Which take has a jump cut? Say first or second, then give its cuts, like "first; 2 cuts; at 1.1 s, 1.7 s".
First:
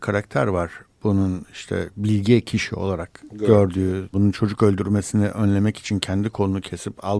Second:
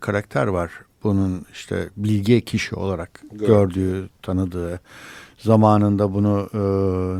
first; 1 cut; at 4.1 s